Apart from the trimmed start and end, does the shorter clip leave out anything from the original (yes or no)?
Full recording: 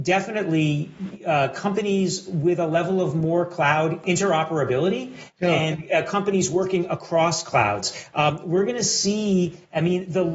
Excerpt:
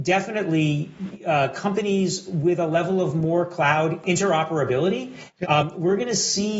yes